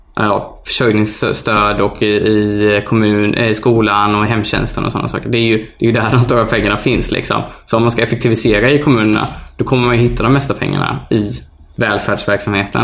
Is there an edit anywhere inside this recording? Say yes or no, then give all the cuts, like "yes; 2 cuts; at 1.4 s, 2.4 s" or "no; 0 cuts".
no; 0 cuts